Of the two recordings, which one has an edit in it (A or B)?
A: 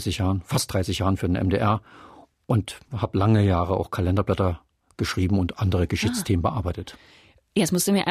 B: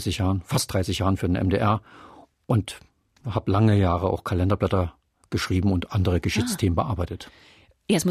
A